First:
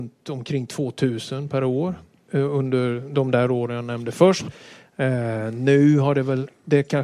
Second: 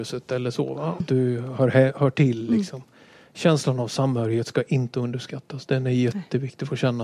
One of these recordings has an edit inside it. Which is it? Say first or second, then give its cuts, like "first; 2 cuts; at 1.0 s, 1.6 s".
second; 1 cut; at 1.0 s